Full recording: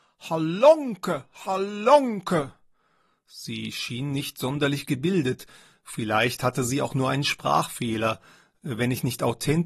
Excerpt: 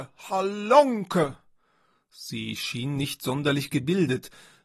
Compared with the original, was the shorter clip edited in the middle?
no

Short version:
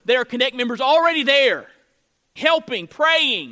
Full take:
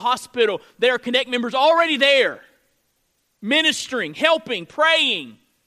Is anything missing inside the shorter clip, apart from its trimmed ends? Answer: yes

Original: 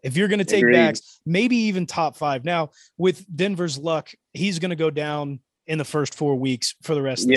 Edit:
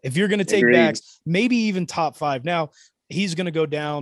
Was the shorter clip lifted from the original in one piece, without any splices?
no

